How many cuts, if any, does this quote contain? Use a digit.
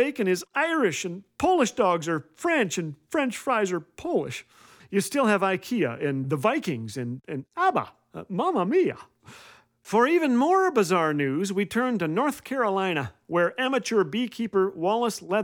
2